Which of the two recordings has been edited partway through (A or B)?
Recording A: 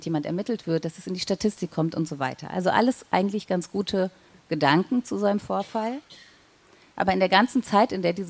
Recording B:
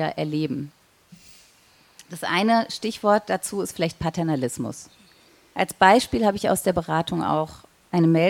B